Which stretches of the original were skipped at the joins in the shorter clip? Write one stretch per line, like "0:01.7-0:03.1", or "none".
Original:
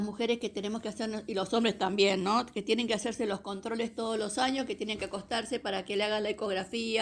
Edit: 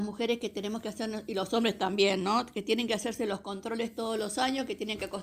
none